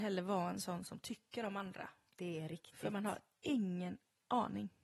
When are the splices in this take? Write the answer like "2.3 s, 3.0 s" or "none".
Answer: none